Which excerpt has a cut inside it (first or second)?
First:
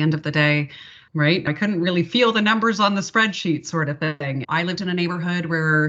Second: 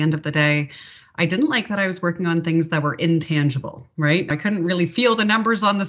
first